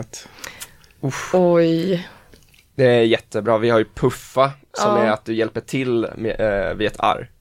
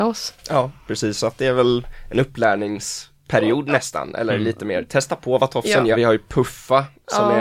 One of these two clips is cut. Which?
second; 1 cut; at 5.9 s

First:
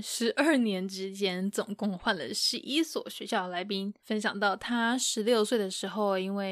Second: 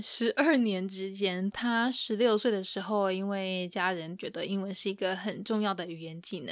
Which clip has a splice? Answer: second; 1 cut; at 1.5 s

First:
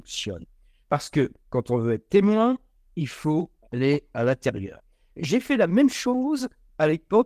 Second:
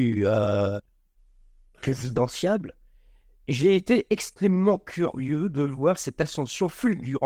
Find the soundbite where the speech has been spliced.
first; 1 cut; at 3.6 s

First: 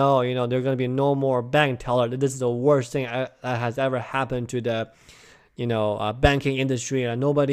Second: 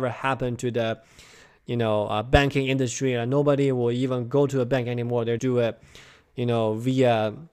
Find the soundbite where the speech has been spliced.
second; 1 cut; at 5.4 s

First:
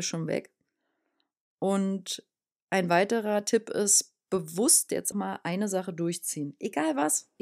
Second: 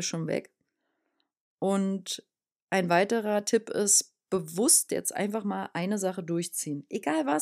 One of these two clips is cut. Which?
first; 1 cut; at 5.1 s

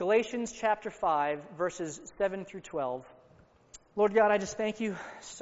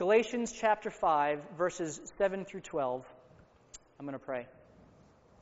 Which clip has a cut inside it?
first; 1 cut; at 3.9 s

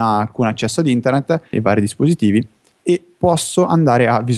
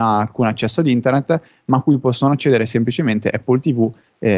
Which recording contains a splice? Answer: first; 1 cut; at 1.5 s

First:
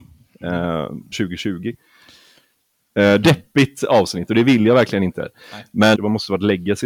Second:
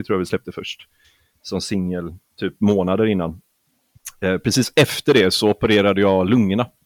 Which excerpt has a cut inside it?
first; 3 cuts; at 1.1 s, 3.2 s, 5.9 s

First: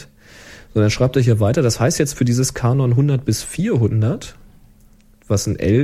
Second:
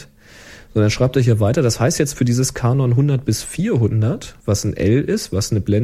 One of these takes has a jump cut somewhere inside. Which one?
second; 1 cut; at 4.4 s

